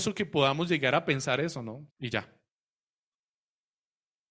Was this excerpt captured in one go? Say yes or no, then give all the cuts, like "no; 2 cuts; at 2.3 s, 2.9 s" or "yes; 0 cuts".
no; 1 cut; at 1.9 s